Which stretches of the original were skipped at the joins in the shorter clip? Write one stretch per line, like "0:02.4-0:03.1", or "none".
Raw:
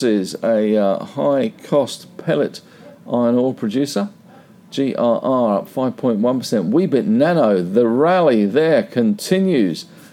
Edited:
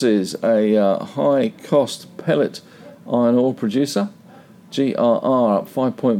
none